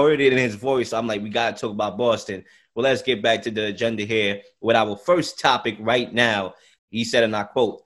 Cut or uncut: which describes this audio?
cut